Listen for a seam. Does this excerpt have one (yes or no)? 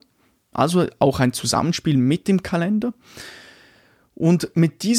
no